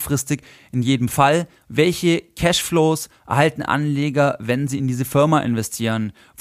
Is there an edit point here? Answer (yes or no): yes